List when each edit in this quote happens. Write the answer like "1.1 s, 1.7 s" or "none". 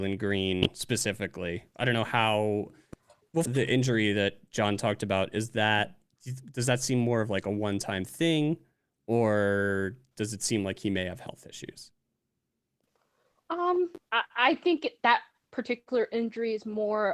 3.5 s